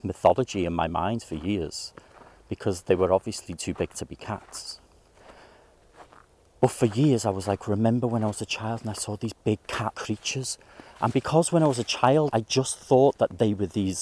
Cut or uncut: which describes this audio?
cut